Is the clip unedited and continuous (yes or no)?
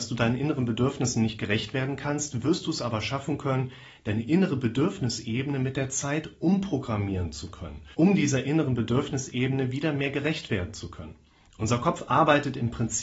no